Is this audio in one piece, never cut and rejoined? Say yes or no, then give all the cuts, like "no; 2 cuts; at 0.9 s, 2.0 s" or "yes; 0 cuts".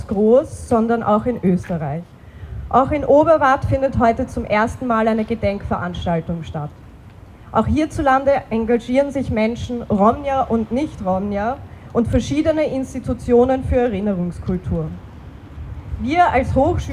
yes; 0 cuts